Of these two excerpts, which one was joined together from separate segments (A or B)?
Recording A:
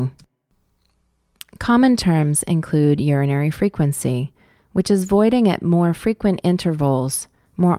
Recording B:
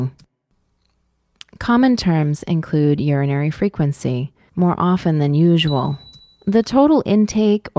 B